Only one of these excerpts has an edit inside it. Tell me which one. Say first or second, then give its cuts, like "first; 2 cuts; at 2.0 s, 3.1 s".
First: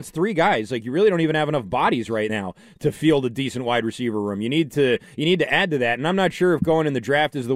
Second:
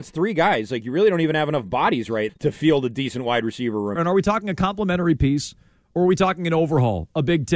second; 2 cuts; at 2.3 s, 4.0 s